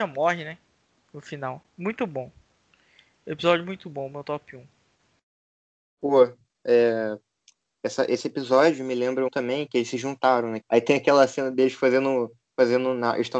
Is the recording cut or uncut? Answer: cut